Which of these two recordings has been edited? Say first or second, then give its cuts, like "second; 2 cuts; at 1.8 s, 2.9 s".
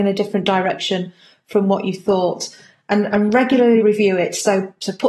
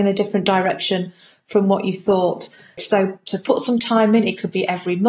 second; 1 cut; at 2.8 s